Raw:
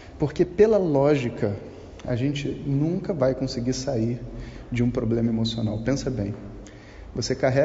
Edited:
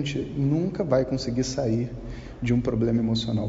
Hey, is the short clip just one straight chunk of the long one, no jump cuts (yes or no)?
yes